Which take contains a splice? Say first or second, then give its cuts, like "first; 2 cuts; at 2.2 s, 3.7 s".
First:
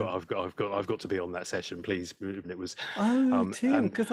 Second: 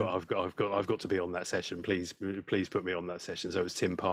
first; 1 cut; at 2.4 s